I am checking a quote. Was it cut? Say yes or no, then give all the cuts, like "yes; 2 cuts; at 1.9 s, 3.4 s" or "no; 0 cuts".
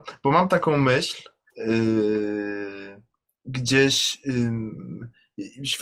yes; 1 cut; at 1.5 s